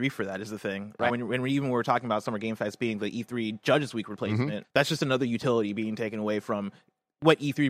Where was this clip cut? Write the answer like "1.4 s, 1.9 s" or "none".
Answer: 1.1 s, 4.6 s

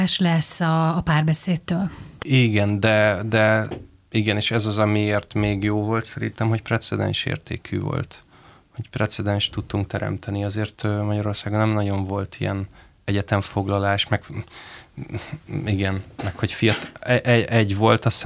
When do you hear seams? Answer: 2.2 s

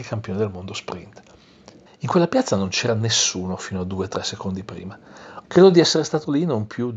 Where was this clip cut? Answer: 1.9 s, 5.4 s

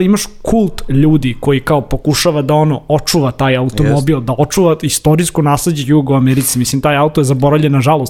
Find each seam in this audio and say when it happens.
none

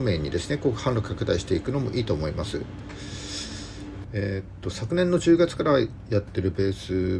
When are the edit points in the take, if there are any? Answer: 4.0 s

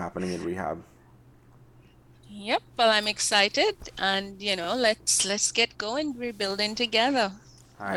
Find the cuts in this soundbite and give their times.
none

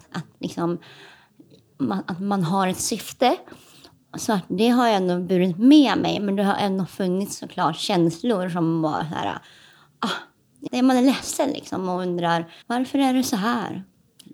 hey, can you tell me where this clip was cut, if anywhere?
10.7 s, 12.6 s

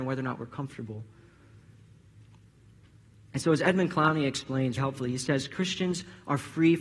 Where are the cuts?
4.8 s

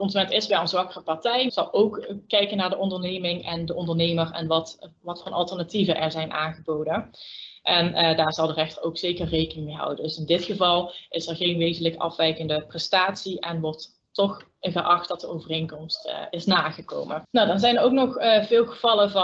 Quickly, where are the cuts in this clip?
1.5 s

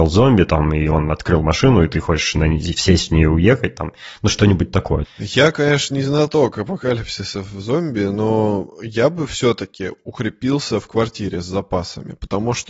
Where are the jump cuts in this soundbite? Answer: 5.0 s

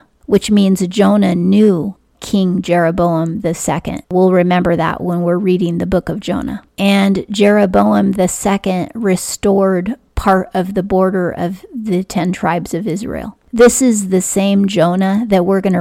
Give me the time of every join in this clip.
4.0 s, 6.7 s, 13.5 s

